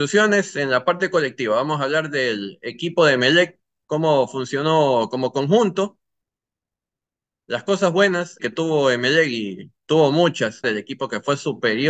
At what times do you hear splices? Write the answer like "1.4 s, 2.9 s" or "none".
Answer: 8.4 s, 10.6 s